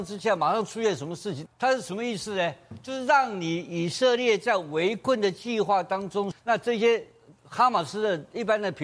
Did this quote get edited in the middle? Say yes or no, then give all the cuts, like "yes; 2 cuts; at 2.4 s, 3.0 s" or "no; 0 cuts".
yes; 2 cuts; at 1.5 s, 6.3 s